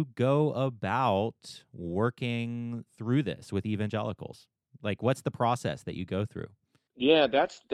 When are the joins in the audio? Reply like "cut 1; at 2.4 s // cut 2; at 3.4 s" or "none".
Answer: none